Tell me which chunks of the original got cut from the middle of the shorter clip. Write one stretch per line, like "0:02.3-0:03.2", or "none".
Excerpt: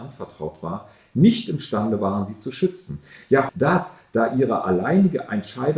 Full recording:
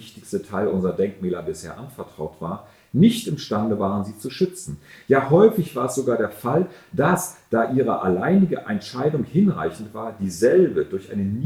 0:05.3-0:06.9